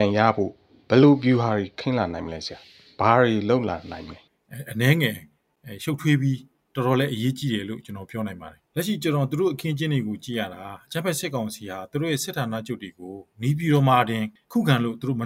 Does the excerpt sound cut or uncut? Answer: cut